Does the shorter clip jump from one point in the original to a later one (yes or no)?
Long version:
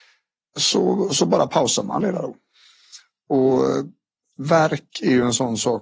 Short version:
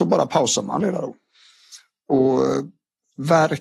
no